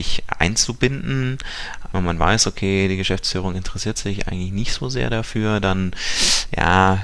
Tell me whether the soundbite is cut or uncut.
cut